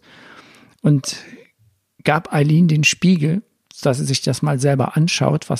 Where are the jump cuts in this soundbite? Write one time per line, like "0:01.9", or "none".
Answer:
none